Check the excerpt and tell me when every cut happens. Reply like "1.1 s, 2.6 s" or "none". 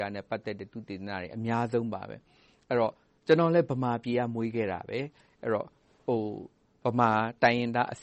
none